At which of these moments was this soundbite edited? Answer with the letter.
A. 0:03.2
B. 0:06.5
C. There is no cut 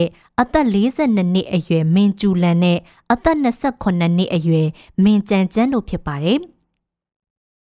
C